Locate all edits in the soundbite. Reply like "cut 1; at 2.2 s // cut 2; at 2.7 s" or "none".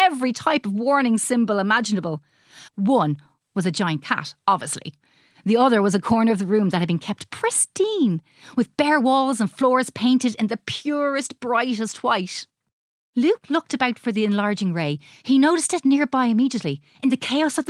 cut 1; at 2.7 s // cut 2; at 13.0 s